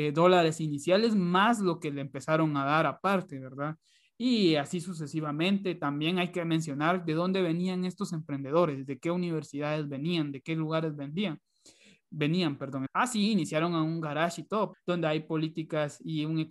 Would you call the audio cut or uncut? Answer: cut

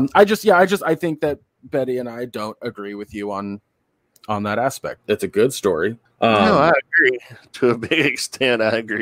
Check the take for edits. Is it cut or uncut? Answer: cut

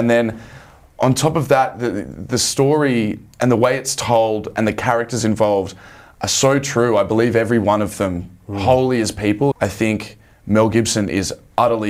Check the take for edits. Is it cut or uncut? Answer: cut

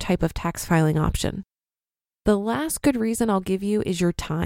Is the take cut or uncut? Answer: cut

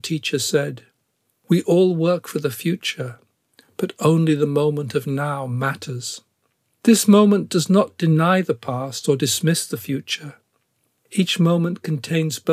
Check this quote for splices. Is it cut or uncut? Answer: uncut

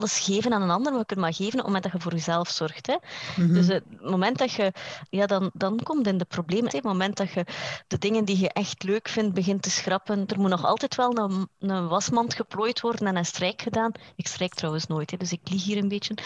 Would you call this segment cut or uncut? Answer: cut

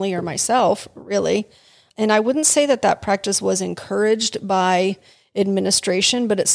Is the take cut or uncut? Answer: uncut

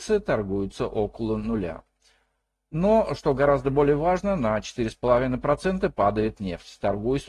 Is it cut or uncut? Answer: uncut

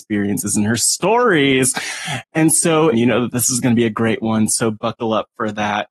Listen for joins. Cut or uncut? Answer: cut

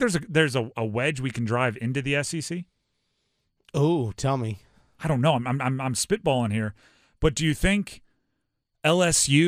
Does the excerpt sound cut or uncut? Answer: uncut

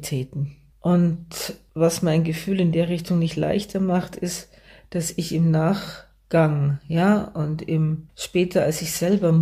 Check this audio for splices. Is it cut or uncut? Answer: cut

